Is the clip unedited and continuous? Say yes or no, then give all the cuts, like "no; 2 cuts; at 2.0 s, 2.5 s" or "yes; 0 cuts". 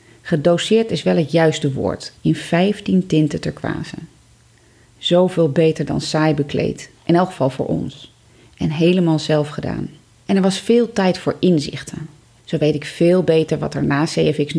no; 3 cuts; at 2.1 s, 10.2 s, 12.4 s